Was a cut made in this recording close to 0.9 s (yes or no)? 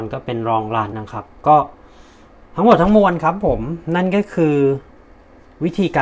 yes